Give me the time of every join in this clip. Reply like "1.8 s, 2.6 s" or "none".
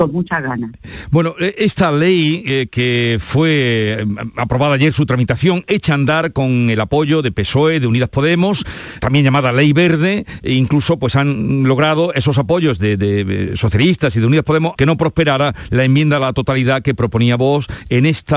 9.0 s, 14.8 s